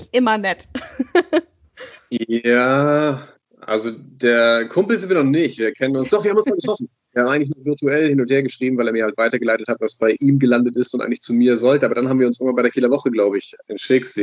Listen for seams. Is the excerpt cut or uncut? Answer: uncut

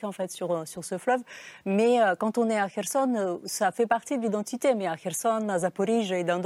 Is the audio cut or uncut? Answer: uncut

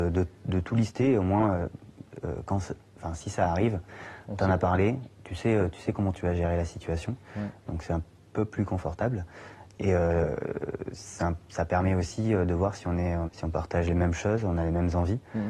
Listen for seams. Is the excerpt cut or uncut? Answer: cut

